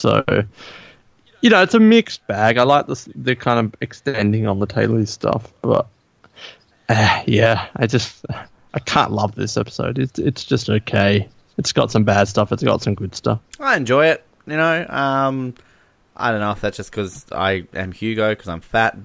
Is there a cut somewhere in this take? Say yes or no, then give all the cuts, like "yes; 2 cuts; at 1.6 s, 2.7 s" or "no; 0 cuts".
no; 0 cuts